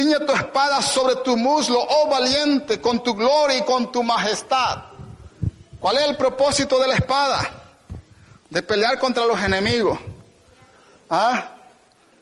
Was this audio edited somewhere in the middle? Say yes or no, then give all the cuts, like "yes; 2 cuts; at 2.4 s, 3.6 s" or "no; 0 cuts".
no; 0 cuts